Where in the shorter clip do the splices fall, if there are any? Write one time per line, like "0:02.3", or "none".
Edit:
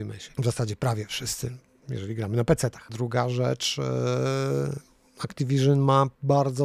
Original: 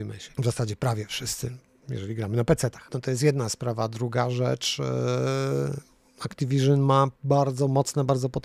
0:02.9